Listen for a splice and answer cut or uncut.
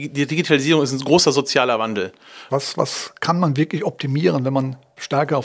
cut